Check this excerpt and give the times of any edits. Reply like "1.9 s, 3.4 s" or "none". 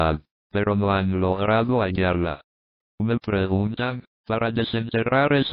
2.8 s